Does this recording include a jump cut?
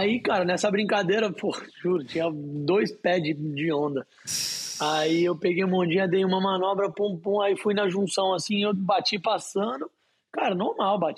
no; 0 cuts

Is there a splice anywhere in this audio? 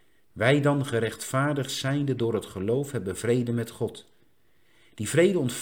no; 0 cuts

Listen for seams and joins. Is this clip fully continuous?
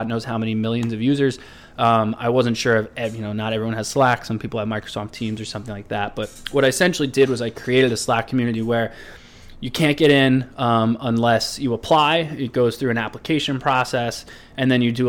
yes; 0 cuts

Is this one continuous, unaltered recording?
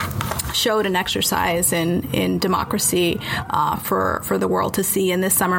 yes; 0 cuts

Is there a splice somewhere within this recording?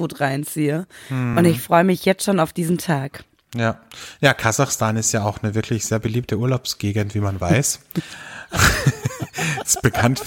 no; 0 cuts

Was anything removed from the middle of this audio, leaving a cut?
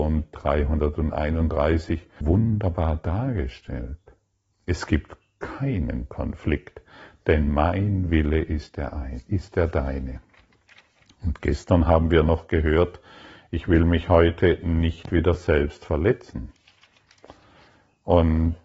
yes; 1 cut; at 2.2 s

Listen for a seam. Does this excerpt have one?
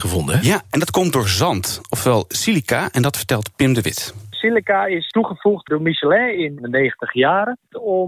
no; 0 cuts

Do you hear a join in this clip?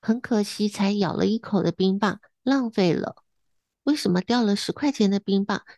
no; 0 cuts

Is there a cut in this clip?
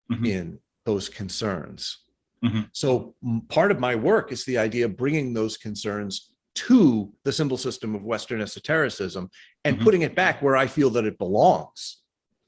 no; 0 cuts

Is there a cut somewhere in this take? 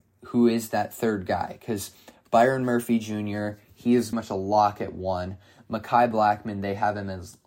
yes; 1 cut; at 4.1 s

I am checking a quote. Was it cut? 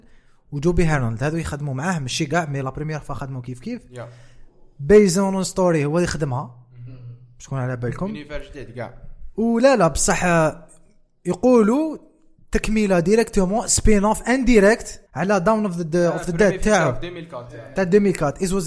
yes; 1 cut; at 15.1 s

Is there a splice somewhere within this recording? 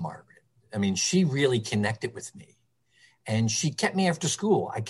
no; 0 cuts

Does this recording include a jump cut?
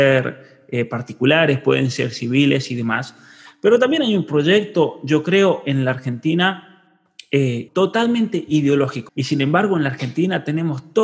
yes; 2 cuts; at 7.7 s, 9.1 s

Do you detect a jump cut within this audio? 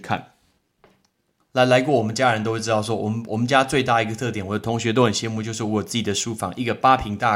yes; 1 cut; at 1.4 s

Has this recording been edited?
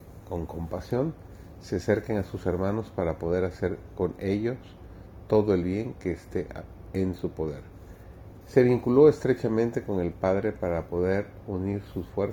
yes; 1 cut; at 8.4 s

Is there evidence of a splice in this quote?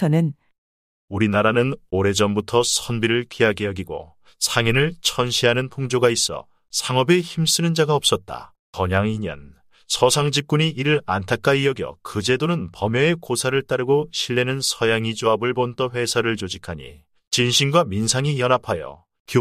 yes; 1 cut; at 8.7 s

